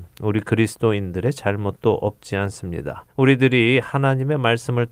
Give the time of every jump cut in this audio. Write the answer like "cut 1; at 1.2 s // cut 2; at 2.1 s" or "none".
cut 1; at 3.1 s